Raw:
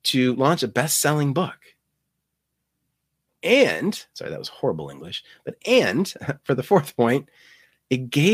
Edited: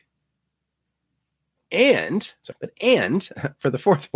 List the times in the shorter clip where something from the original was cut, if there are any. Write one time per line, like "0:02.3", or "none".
0:02.5